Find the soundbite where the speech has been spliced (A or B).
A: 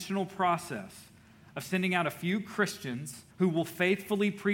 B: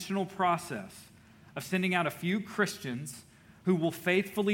A